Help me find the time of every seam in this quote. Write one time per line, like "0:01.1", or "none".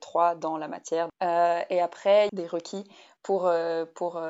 0:01.1
0:02.3